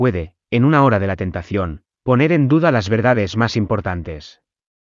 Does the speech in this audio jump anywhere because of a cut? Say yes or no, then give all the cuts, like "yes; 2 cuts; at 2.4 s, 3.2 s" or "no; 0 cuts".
no; 0 cuts